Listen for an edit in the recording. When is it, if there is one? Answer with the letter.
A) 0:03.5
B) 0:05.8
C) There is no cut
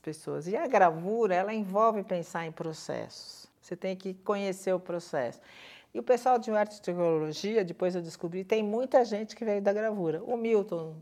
A